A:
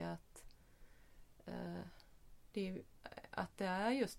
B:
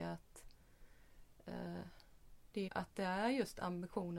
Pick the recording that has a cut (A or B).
B